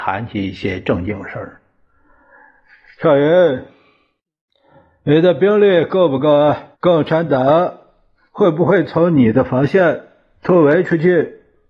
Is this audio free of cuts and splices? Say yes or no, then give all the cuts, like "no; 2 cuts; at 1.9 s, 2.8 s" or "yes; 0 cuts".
no; 1 cut; at 6.7 s